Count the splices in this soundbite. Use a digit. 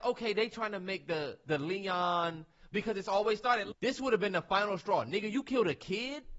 1